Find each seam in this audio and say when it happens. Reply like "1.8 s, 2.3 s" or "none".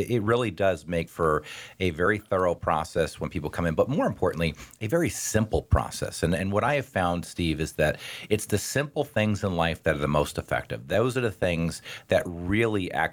none

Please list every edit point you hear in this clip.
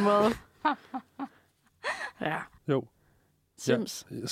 2.6 s

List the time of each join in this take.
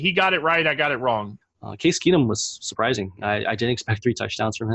1.4 s

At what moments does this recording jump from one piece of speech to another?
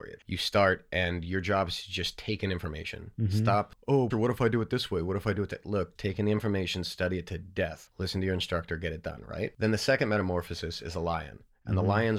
4.1 s, 6.0 s

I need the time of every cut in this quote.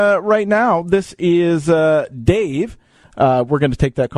3.0 s

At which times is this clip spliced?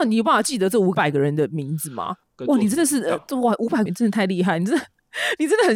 2.2 s, 3.9 s

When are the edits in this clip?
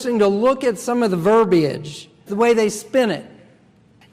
2.3 s

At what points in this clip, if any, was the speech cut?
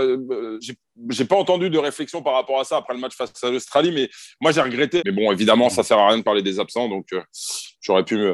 5.0 s

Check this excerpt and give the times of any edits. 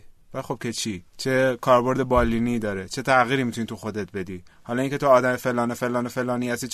1.1 s

